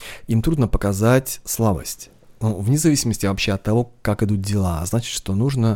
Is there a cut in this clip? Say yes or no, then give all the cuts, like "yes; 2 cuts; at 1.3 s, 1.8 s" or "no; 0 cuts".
no; 0 cuts